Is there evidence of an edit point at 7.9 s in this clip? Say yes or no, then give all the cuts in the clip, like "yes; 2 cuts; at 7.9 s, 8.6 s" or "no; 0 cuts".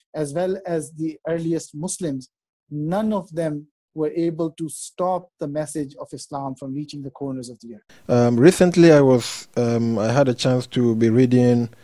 yes; 1 cut; at 7.9 s